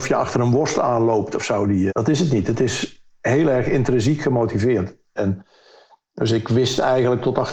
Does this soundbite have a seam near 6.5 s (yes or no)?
no